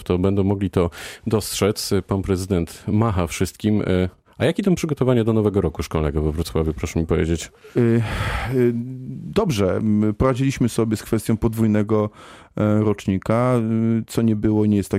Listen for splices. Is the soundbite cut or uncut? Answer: uncut